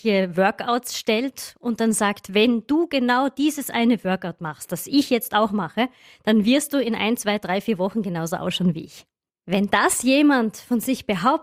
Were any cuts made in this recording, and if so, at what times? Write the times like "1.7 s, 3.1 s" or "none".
none